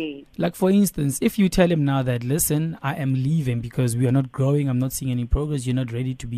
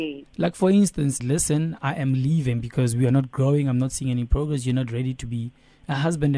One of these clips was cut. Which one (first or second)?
second